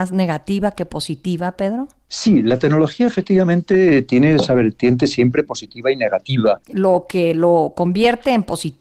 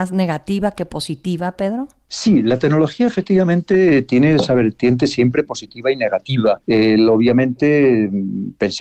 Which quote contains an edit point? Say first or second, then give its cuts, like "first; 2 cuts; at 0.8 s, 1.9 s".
first; 1 cut; at 6.6 s